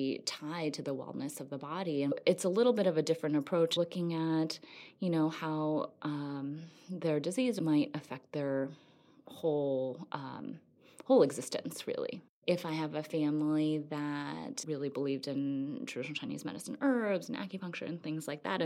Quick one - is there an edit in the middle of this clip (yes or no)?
no